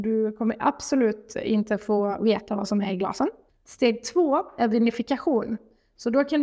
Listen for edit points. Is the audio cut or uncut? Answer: cut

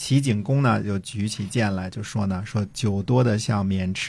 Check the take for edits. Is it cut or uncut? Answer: uncut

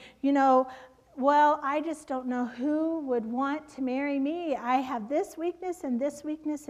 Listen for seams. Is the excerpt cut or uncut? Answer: uncut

